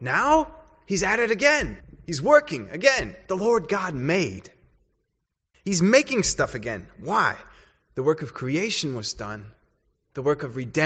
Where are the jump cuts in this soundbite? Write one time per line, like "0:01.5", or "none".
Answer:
none